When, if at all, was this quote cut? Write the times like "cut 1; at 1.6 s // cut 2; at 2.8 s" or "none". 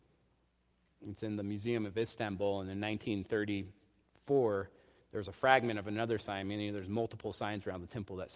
cut 1; at 1.0 s